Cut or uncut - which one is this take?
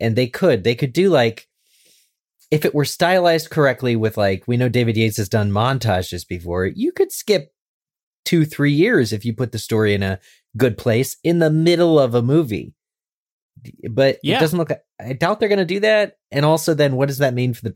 uncut